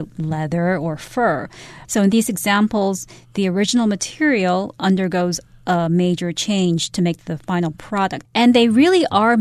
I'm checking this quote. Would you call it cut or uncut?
cut